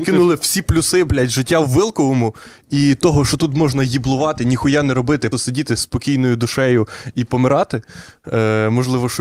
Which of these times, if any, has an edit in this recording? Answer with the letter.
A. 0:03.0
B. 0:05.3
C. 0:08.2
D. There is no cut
B